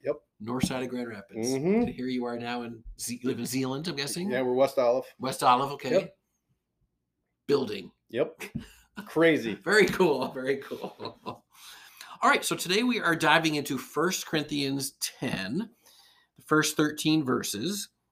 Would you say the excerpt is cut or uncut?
uncut